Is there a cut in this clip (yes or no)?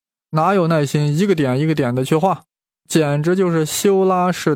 no